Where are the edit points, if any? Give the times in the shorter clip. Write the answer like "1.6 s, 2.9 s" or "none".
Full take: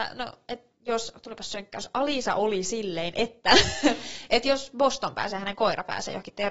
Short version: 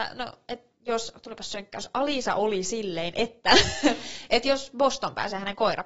none